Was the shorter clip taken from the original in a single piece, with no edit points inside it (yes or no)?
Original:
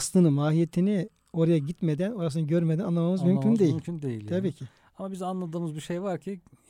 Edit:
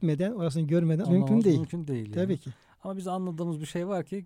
no